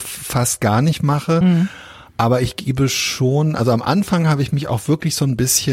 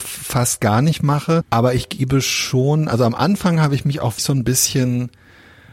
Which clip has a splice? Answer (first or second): second